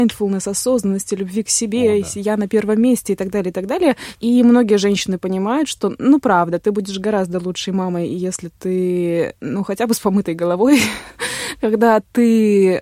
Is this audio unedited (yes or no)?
yes